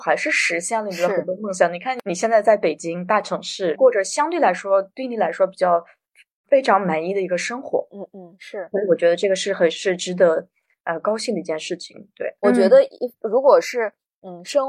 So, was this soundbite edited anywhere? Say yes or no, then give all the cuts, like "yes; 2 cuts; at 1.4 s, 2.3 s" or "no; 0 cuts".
yes; 1 cut; at 12.4 s